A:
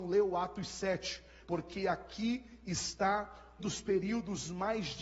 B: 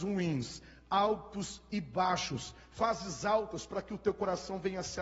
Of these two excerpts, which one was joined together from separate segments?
A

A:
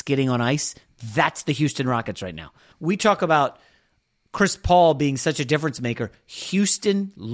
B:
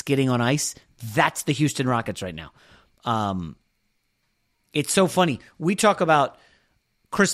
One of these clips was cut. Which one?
A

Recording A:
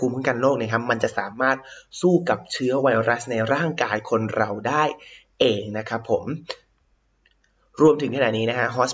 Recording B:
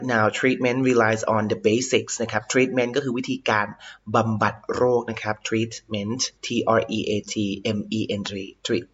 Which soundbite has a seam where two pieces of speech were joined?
B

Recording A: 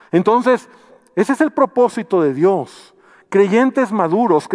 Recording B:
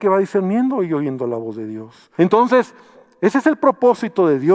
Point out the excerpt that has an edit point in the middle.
B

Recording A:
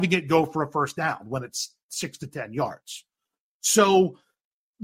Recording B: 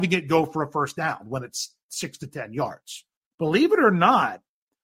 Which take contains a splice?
B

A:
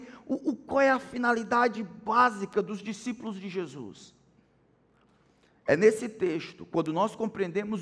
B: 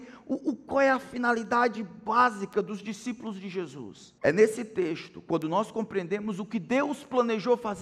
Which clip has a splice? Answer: B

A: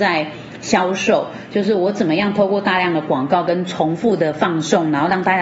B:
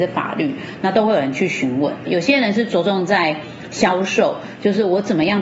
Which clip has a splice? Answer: B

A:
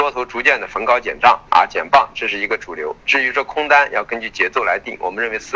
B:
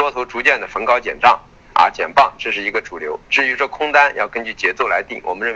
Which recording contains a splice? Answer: A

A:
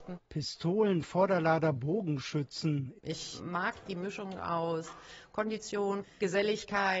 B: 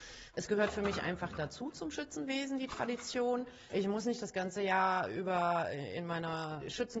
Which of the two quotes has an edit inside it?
A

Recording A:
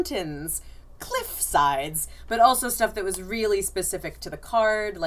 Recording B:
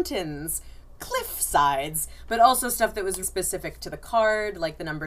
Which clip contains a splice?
B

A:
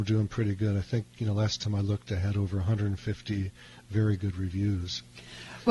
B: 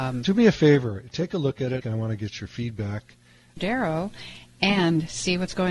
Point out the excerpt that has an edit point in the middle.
B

